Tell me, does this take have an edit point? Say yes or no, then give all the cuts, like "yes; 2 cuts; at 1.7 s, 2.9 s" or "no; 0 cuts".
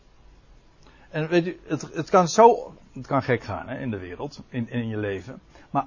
no; 0 cuts